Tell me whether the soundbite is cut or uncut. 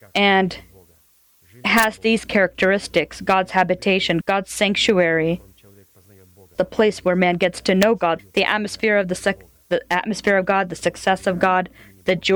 cut